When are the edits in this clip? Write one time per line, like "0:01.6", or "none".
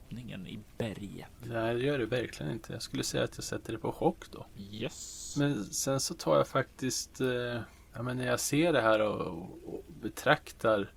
none